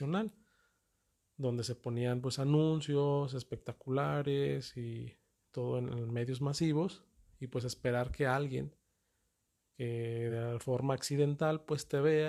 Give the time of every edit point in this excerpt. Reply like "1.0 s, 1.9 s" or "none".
none